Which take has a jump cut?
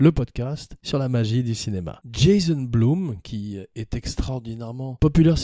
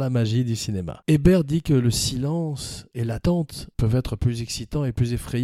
first; 1 cut; at 2.0 s

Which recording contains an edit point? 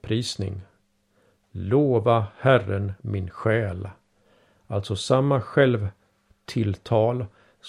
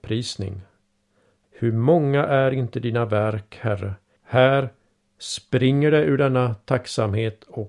second; 2 cuts; at 1.4 s, 4.2 s

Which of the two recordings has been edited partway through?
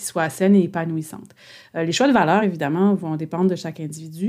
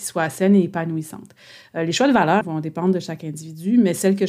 second; 1 cut; at 2.4 s

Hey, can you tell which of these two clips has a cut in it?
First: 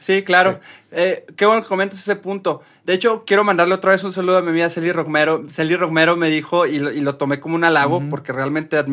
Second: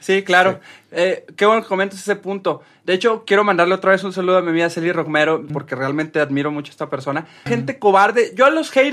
second; 2 cuts; at 5.5 s, 7.5 s

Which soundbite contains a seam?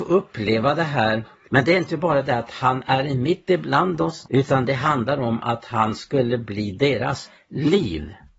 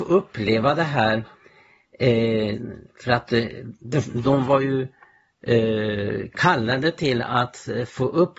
first; 2 cuts; at 1.5 s, 4.3 s

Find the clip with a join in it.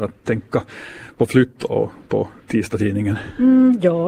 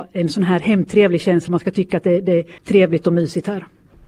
second; 2 cuts; at 1.5 s, 2.6 s

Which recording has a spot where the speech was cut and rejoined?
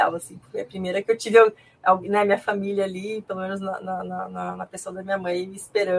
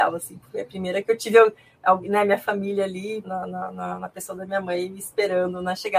second; 1 cut; at 3.2 s

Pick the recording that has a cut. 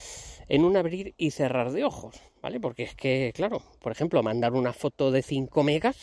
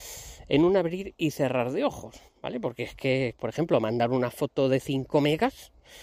second; 1 cut; at 3.3 s

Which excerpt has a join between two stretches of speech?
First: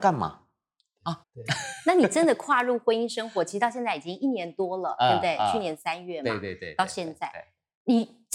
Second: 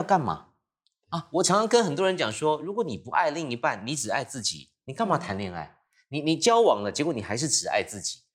first; 1 cut; at 1.2 s

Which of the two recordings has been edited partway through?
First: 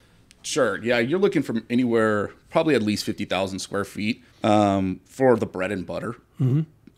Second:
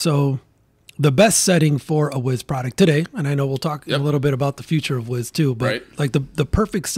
first; 1 cut; at 4.3 s

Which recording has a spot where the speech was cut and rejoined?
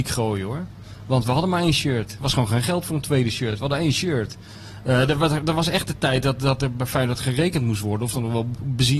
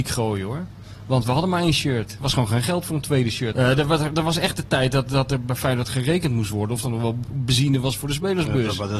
second; 1 cut; at 3.5 s

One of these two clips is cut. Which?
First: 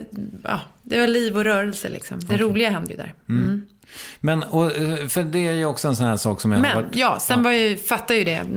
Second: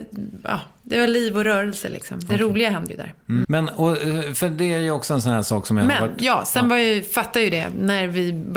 second; 1 cut; at 3.4 s

